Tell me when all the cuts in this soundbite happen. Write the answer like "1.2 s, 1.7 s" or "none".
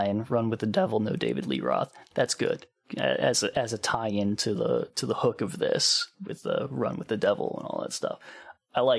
none